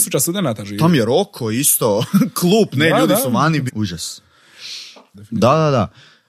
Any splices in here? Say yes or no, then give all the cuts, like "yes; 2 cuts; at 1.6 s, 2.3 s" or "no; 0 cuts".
yes; 2 cuts; at 3.7 s, 5.1 s